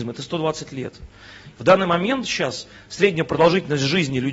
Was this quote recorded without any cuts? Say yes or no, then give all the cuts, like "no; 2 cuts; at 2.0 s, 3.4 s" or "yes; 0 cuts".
no; 1 cut; at 1.5 s